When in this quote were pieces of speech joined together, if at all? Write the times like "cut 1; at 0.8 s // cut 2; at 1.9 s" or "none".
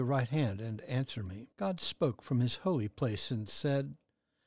cut 1; at 1.5 s